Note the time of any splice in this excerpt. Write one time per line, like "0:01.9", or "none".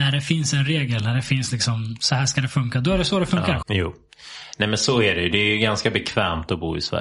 0:03.6